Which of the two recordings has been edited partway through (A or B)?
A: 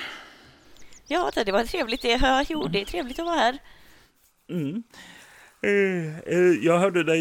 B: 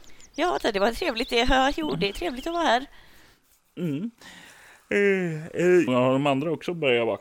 B